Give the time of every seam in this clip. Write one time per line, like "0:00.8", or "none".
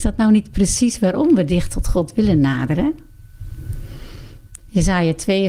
0:04.6